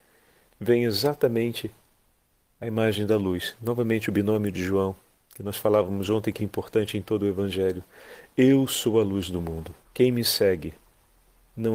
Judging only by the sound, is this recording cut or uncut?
cut